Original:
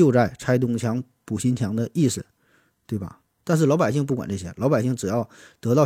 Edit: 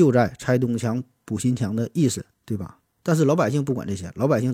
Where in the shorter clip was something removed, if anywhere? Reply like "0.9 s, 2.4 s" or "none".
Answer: 2.3 s